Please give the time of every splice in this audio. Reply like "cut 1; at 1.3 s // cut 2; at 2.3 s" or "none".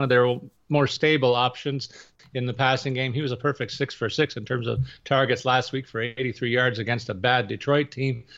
none